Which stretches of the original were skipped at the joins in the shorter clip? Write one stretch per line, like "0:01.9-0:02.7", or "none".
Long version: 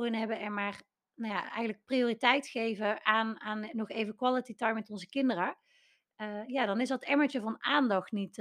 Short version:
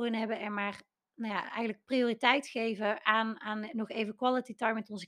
none

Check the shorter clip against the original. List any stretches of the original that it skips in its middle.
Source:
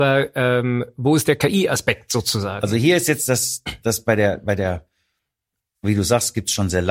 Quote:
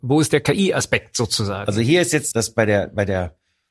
0:03.3-0:03.8

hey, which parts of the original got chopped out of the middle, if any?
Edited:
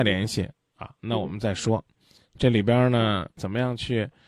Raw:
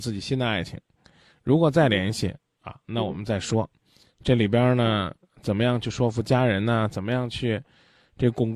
0:05.2-0:06.9

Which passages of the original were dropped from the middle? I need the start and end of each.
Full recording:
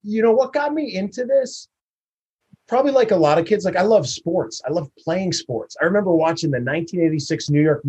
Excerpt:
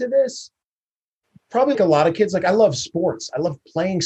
0:02.9-0:03.1

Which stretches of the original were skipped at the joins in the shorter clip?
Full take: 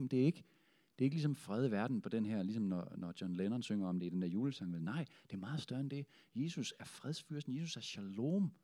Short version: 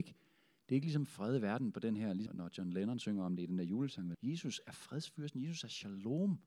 0:02.6-0:02.9
0:04.8-0:06.3

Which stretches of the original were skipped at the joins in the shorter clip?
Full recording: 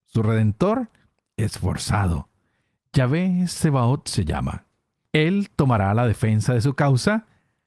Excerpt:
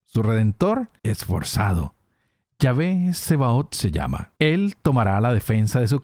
0:01.0-0:01.3
0:04.7-0:05.1

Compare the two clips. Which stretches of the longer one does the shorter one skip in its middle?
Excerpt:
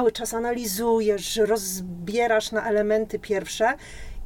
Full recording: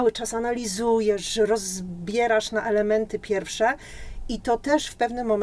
none

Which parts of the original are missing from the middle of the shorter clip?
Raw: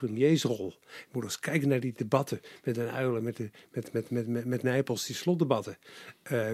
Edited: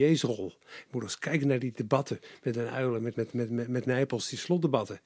0:03.3-0:03.9

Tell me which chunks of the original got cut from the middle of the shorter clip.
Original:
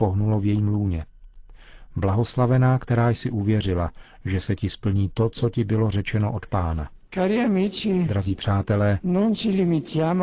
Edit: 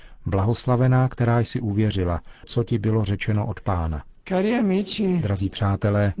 0:04.1-0:05.3

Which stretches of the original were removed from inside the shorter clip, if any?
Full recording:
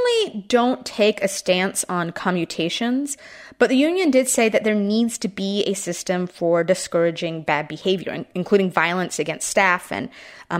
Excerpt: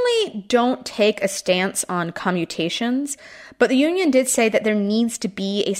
none

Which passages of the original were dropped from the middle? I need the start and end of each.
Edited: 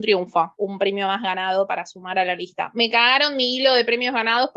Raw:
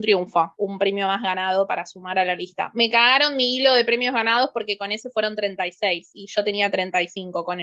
none

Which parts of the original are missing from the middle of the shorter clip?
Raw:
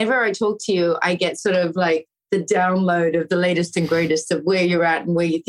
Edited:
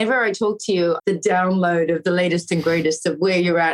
0:01.0-0:02.2

